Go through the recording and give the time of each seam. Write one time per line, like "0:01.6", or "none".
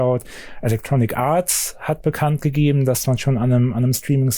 none

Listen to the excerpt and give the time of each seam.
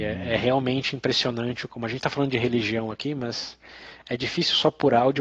0:01.7

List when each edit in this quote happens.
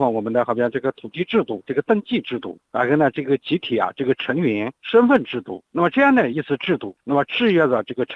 0:01.6
0:06.3

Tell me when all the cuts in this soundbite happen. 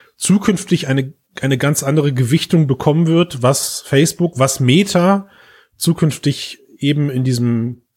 none

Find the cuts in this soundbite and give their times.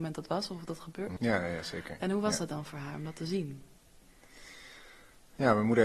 0:01.2

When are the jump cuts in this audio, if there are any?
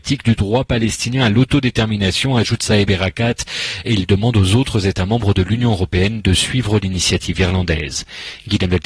none

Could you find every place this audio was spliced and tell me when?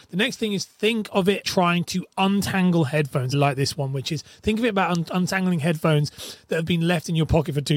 0:01.4
0:03.3

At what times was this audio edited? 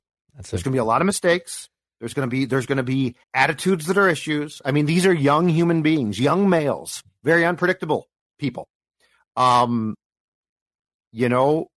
0:03.2

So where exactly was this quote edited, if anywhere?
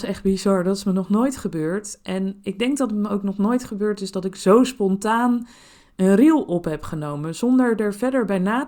none

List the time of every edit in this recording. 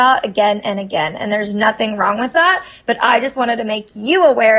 none

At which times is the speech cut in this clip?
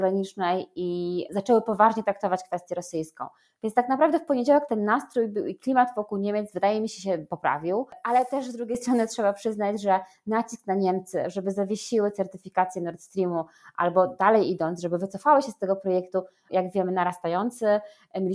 0:04.7
0:16.5

